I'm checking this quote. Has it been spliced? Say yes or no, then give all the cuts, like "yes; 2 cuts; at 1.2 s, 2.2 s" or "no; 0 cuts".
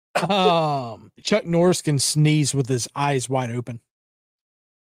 yes; 1 cut; at 1.1 s